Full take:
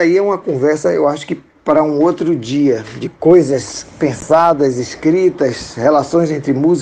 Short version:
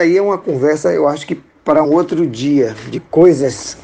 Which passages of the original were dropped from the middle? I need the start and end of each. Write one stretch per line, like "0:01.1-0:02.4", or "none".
0:01.8-0:01.9